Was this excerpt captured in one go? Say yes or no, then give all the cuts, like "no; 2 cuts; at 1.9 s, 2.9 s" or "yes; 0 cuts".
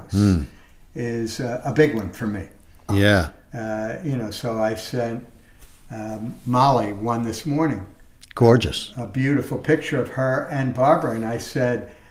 no; 1 cut; at 2.9 s